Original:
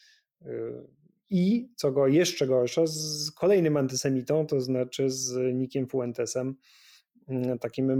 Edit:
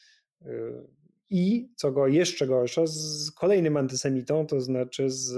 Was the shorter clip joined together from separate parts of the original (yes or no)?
no